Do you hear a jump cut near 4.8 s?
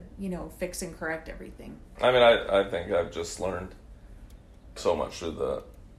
yes; 2 cuts; at 2.0 s, 4.8 s

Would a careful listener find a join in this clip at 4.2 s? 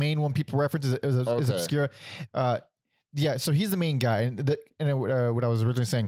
no; 1 cut; at 2.3 s

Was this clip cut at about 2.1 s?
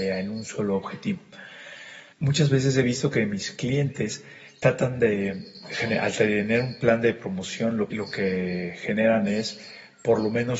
yes; 2 cuts; at 2.1 s, 7.9 s

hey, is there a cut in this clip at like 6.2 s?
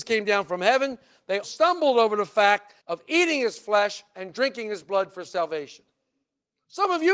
no; 2 cuts; at 1.4 s, 2.8 s

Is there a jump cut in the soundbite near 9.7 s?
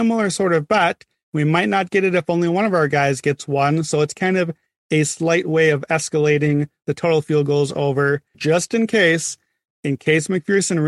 no; 1 cut; at 8.3 s

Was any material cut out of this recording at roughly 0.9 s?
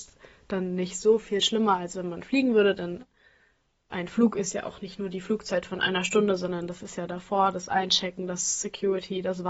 no; 0 cuts

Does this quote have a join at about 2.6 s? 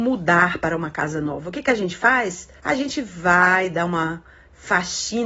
yes; 1 cut; at 2.6 s

